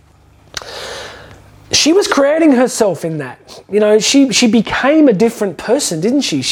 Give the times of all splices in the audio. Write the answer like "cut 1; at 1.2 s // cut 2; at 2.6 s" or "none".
none

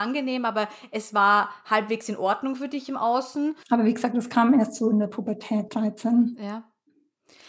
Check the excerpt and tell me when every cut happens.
cut 1; at 3.6 s // cut 2; at 5.7 s

